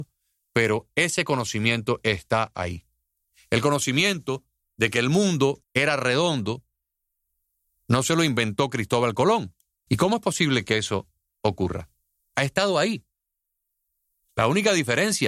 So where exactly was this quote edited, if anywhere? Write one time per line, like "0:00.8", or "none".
0:05.6
0:09.9
0:12.3